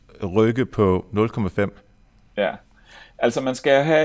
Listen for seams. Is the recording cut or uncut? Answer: uncut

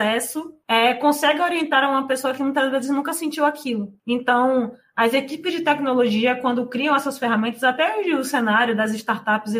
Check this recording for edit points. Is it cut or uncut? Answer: uncut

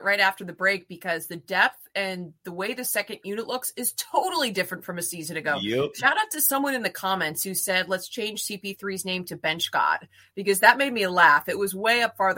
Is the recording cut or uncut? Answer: uncut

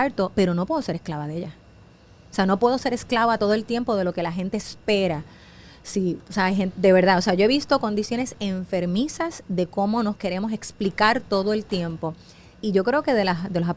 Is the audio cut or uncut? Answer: uncut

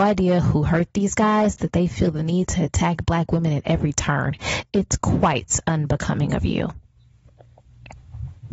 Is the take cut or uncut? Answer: cut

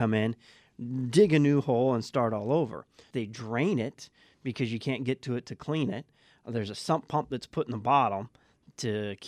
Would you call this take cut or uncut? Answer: cut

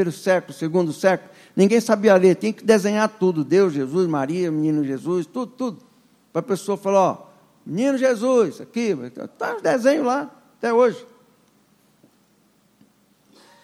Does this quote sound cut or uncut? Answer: cut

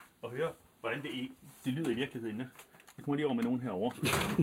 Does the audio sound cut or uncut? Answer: uncut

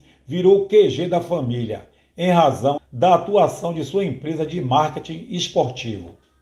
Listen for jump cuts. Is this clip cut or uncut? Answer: cut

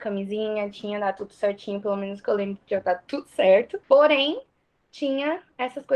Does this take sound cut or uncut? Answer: cut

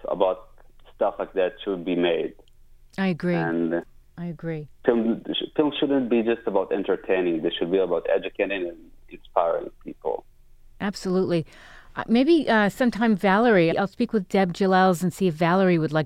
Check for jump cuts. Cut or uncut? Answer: cut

